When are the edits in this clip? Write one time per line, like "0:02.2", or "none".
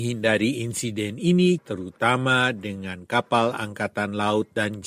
0:01.6